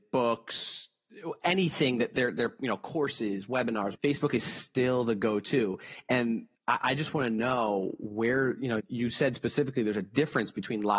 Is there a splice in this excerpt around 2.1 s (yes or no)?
no